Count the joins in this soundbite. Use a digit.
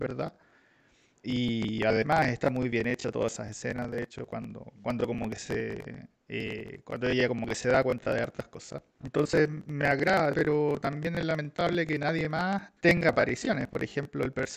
3